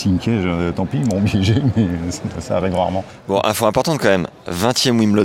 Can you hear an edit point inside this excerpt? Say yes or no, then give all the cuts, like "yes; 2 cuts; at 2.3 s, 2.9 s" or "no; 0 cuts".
yes; 1 cut; at 2.3 s